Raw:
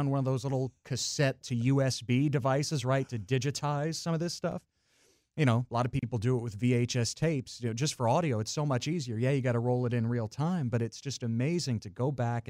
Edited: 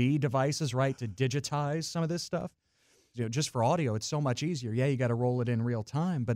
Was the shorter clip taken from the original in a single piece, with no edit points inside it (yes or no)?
no